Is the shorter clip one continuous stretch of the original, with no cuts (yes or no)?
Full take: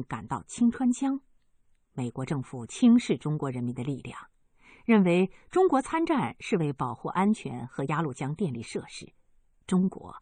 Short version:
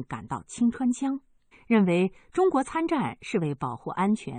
no